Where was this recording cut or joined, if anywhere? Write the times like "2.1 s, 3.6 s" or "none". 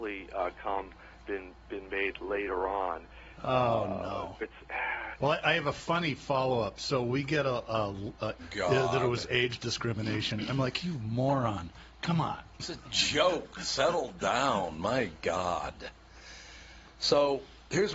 4.4 s, 8.4 s